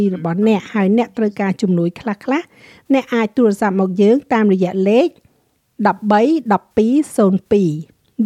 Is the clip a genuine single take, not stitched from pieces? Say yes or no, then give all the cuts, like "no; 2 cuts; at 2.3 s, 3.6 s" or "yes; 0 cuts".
yes; 0 cuts